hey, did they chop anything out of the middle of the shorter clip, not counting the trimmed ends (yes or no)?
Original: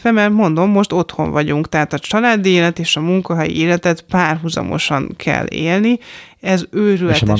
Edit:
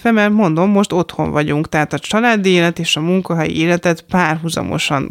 no